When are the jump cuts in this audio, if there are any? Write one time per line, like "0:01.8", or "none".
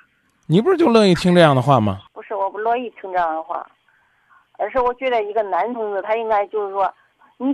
none